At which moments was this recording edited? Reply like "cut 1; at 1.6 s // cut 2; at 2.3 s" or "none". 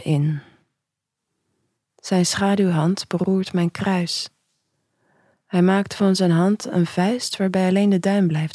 none